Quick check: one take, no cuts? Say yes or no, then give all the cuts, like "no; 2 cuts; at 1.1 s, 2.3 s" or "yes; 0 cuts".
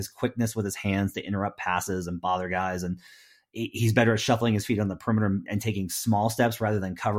yes; 0 cuts